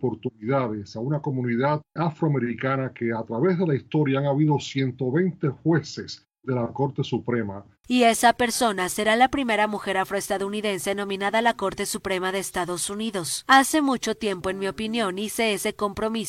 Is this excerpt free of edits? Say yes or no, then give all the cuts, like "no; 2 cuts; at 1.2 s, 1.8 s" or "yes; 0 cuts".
no; 2 cuts; at 2.0 s, 7.8 s